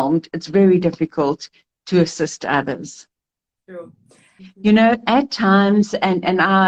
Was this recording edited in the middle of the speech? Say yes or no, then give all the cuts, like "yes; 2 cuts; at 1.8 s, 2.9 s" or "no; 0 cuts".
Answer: yes; 1 cut; at 4.4 s